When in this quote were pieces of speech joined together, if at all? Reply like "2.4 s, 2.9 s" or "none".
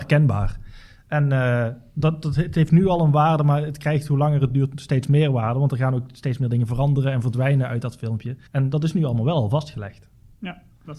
8.5 s